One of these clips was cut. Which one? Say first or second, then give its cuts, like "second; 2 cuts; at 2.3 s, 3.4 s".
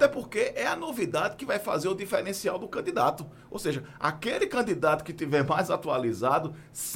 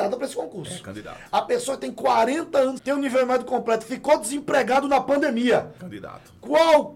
second; 2 cuts; at 2.8 s, 5.8 s